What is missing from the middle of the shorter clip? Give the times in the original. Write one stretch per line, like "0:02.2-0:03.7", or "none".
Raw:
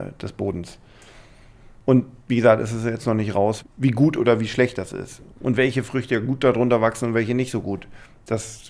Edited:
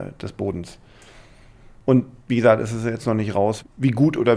none